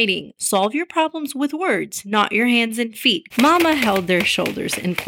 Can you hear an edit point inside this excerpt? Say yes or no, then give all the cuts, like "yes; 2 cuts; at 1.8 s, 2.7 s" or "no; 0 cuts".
yes; 1 cut; at 3.3 s